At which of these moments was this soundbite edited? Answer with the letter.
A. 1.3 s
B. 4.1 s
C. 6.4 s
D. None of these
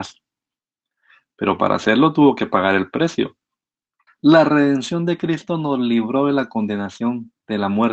B